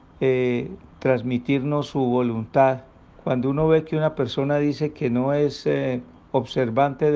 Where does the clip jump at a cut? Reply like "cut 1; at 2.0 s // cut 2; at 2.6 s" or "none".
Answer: cut 1; at 3.1 s